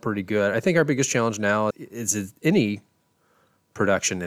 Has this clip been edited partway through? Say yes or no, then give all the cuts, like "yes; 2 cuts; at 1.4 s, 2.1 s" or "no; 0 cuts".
yes; 1 cut; at 1.7 s